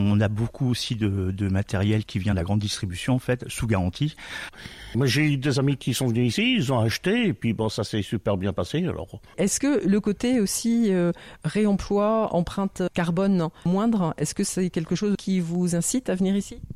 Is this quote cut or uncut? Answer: cut